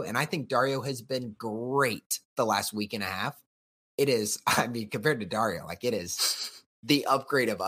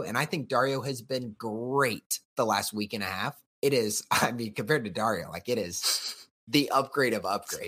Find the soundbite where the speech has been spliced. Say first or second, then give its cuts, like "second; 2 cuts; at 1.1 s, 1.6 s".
second; 1 cut; at 3.5 s